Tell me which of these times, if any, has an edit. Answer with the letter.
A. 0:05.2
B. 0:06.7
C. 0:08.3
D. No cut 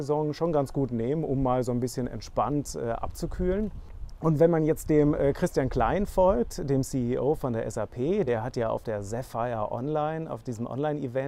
D